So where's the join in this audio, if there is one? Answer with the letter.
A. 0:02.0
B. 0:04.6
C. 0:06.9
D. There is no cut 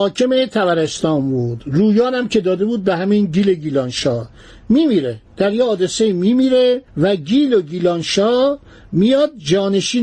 C